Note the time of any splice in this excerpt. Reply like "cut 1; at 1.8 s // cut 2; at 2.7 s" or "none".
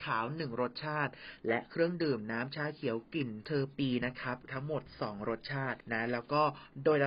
cut 1; at 4.0 s